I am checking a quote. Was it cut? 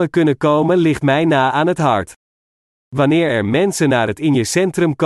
no; 0 cuts

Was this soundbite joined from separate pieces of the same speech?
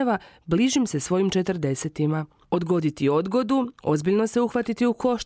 yes; 1 cut; at 2.4 s

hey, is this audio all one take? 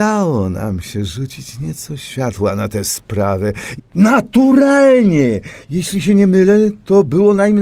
no; 1 cut; at 3.8 s

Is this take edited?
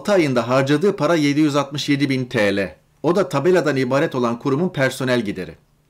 no; 0 cuts

